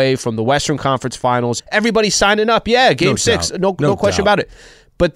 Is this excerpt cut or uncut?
cut